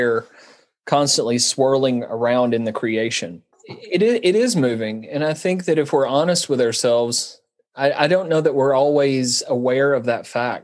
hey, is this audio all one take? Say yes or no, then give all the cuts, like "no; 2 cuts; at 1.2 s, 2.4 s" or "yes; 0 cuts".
no; 1 cut; at 3.5 s